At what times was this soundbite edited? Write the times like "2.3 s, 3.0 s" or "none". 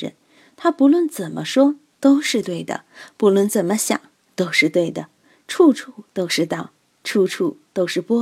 none